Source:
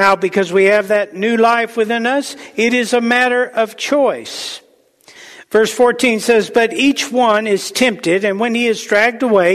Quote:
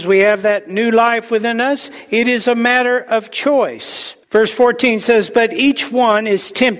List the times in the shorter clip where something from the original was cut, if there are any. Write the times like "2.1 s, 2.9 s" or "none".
4.2 s